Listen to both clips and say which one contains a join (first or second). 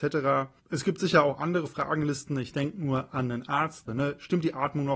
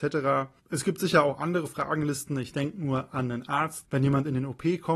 first